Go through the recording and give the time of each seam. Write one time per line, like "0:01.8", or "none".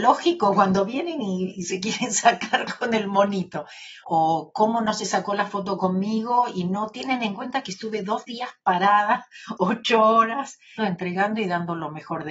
0:04.0
0:10.8